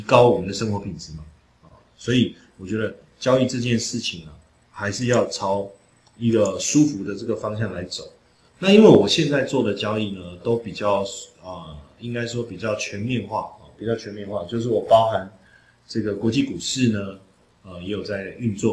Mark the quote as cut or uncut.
uncut